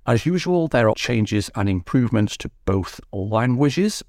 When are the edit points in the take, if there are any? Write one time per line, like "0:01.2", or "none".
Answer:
0:00.9